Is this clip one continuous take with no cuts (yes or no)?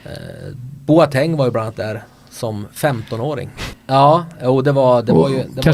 no